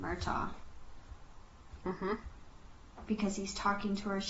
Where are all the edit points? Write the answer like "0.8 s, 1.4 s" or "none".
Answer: 1.8 s